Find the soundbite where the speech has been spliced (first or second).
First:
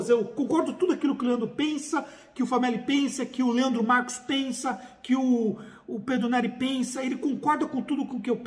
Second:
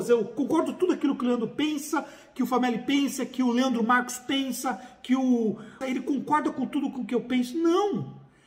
second